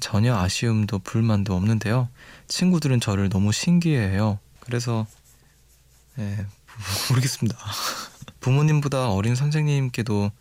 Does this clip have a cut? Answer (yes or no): yes